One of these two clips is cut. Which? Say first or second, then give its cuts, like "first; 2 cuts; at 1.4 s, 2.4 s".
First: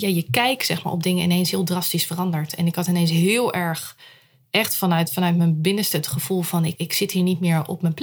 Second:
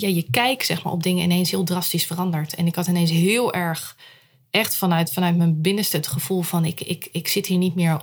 first; 1 cut; at 6.7 s